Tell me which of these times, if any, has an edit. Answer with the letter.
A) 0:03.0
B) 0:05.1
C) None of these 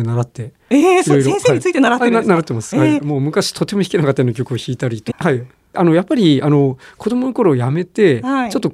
B